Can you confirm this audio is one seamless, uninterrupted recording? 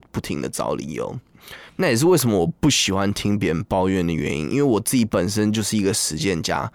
no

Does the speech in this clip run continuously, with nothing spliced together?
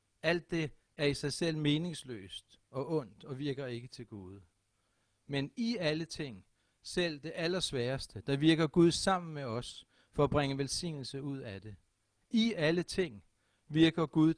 no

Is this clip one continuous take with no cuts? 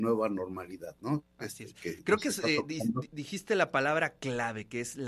yes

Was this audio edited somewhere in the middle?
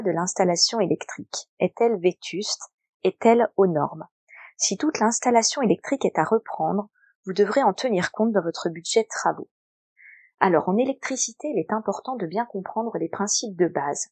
no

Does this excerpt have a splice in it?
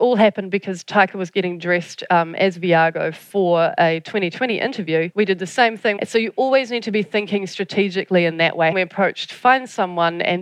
yes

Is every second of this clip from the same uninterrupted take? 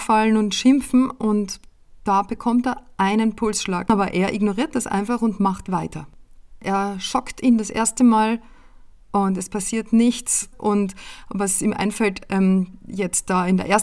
no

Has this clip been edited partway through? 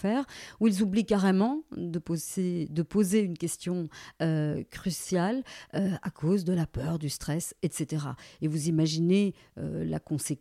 no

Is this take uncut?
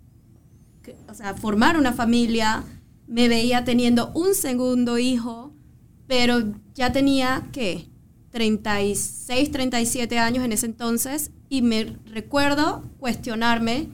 yes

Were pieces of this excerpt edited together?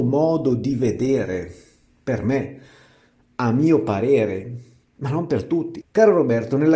yes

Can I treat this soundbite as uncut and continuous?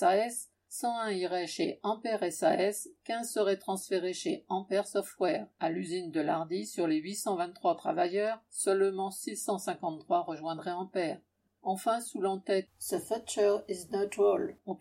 no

